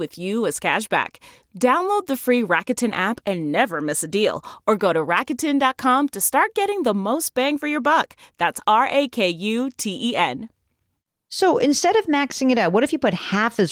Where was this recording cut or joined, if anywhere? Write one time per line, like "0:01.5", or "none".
none